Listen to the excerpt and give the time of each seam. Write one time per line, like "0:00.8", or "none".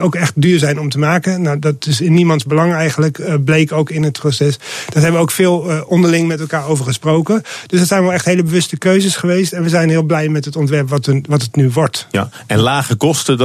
none